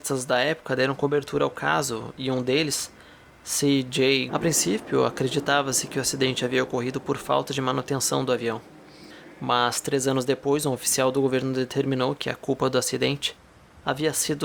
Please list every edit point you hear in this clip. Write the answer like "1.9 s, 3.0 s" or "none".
4.3 s